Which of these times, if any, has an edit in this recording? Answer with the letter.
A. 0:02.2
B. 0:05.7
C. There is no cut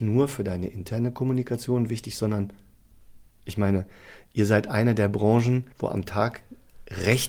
B